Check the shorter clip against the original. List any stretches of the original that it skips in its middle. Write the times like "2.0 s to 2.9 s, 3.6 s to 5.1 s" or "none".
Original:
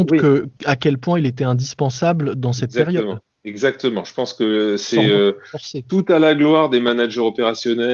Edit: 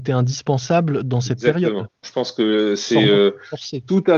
3.3 s to 4.0 s